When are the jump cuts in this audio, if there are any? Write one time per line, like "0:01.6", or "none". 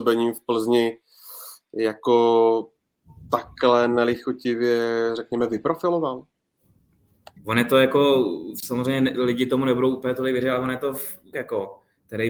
0:07.4
0:11.3